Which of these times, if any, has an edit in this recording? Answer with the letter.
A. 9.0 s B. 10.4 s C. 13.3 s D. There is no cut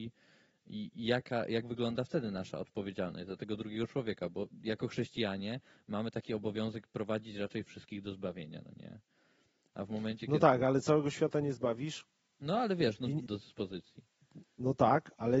C